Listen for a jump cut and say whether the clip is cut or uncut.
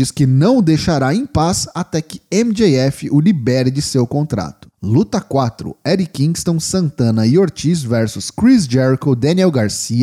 cut